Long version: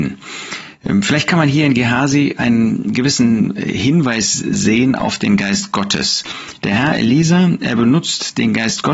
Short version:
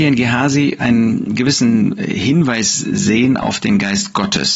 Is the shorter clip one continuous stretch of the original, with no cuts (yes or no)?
yes